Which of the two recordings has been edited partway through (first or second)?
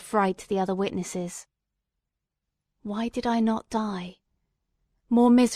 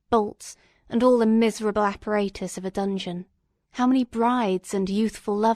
second